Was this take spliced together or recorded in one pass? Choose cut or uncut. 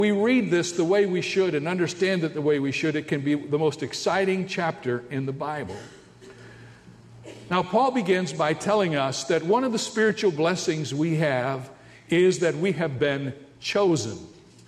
uncut